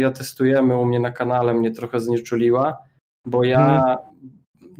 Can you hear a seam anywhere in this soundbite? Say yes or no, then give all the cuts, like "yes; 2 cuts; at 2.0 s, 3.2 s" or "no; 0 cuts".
no; 0 cuts